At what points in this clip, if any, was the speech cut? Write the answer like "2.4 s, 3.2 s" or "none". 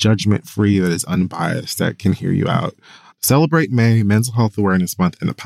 3.1 s